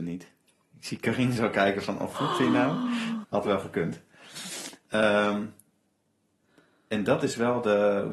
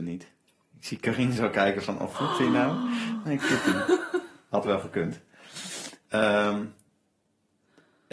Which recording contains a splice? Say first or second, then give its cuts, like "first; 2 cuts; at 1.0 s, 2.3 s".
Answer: first; 1 cut; at 3.2 s